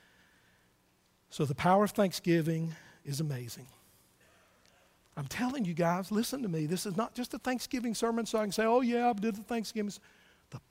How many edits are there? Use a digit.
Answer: 0